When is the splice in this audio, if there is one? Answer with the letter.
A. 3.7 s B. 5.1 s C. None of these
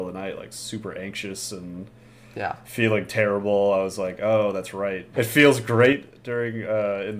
B